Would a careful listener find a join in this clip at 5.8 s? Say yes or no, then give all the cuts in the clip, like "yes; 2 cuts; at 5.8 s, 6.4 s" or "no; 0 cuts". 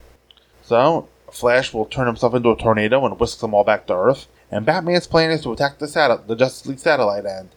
no; 1 cut; at 4.4 s